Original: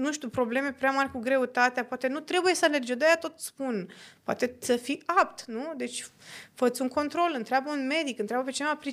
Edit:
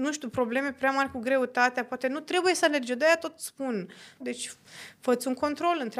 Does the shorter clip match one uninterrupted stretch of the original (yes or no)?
no